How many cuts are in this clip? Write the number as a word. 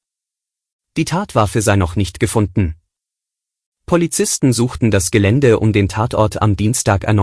zero